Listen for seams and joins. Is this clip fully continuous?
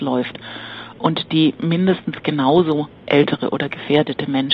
yes; 0 cuts

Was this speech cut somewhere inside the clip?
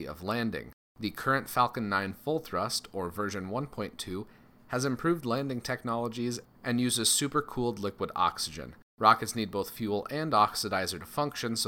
yes; 1 cut; at 8.9 s

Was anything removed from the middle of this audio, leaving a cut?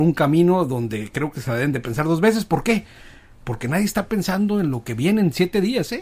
no; 0 cuts

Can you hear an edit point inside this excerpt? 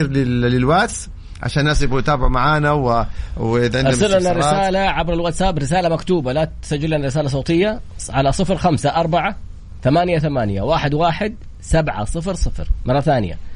no; 0 cuts

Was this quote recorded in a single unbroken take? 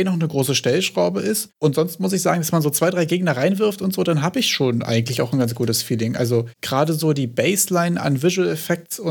yes; 0 cuts

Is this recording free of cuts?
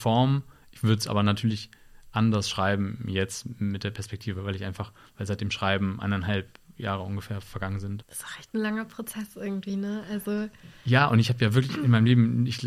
no; 1 cut; at 8.0 s

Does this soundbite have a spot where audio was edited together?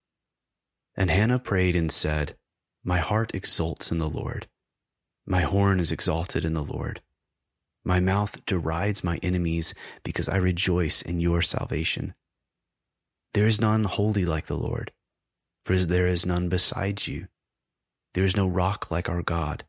no; 0 cuts

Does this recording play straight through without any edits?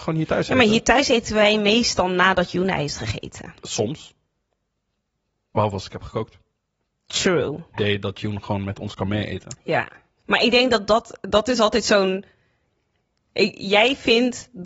no; 1 cut; at 7.7 s

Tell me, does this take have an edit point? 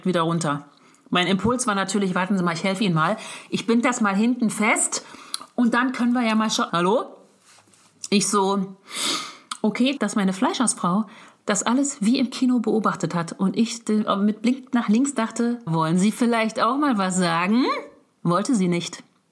yes; 3 cuts; at 6.7 s, 10.0 s, 15.7 s

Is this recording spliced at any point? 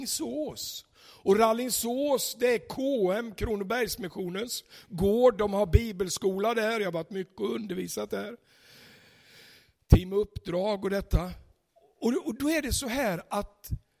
no; 0 cuts

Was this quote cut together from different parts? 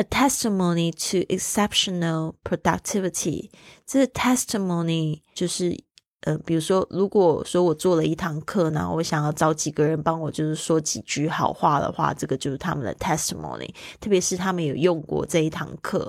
yes; 1 cut; at 5.3 s

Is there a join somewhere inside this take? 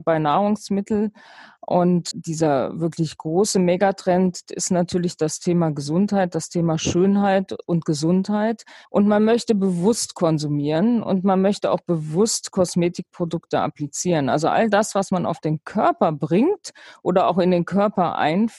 yes; 3 cuts; at 2.1 s, 4.4 s, 8.8 s

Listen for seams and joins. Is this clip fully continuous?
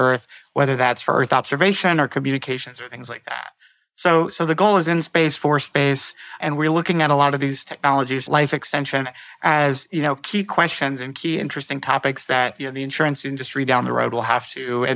no; 2 cuts; at 6.4 s, 8.3 s

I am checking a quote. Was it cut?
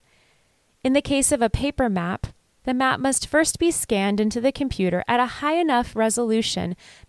no; 0 cuts

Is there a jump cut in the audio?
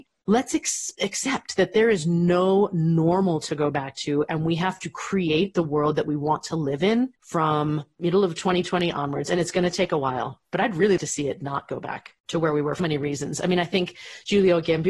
yes; 2 cuts; at 11.0 s, 12.8 s

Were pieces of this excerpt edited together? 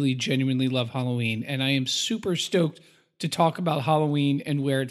no; 0 cuts

